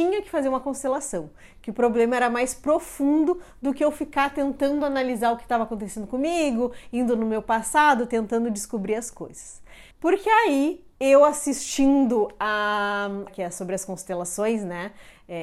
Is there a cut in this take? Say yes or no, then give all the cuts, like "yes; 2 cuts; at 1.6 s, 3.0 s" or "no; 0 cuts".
yes; 2 cuts; at 9.9 s, 13.3 s